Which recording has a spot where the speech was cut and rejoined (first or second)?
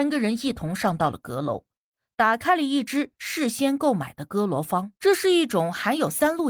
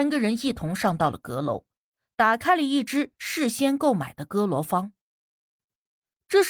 first